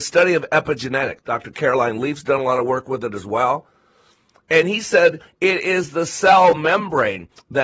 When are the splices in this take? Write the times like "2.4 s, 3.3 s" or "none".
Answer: 1.2 s